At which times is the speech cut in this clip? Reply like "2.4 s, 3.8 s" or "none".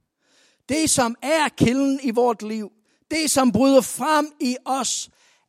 none